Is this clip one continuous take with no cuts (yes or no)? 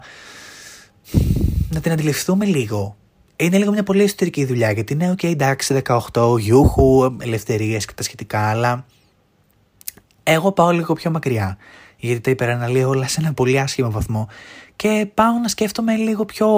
yes